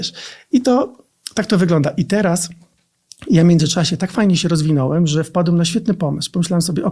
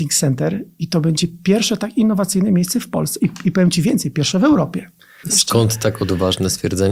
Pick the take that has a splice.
second; 1 cut; at 5.2 s

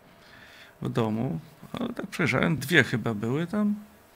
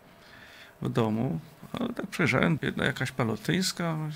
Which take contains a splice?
second; 1 cut; at 2.6 s

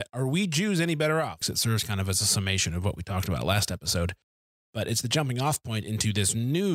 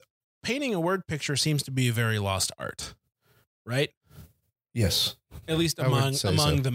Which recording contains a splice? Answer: first; 1 cut; at 1.4 s

